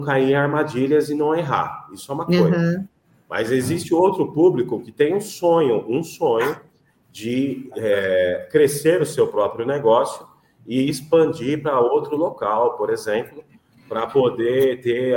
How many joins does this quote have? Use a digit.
0